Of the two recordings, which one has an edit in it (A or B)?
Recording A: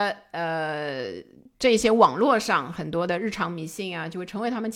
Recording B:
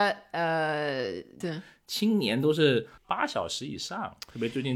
B